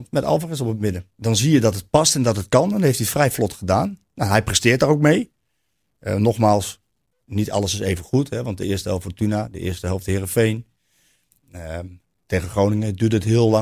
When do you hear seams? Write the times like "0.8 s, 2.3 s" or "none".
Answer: none